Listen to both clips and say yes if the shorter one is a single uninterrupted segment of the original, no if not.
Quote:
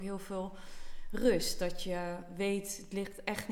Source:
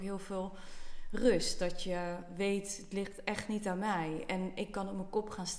yes